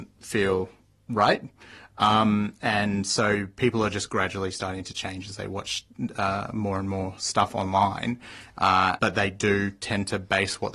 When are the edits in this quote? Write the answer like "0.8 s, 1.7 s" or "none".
9.0 s